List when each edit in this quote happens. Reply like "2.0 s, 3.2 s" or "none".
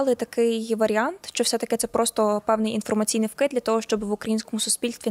none